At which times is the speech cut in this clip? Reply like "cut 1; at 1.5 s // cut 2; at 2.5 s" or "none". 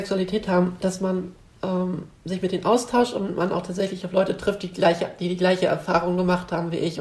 none